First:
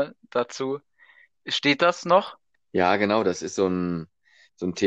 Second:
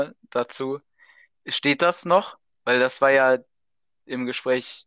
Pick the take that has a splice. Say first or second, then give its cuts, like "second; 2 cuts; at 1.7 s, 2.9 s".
first; 1 cut; at 2.5 s